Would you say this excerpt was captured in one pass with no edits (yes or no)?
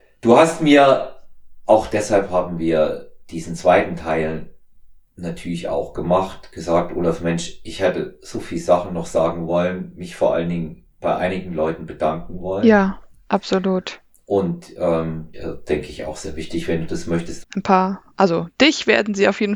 no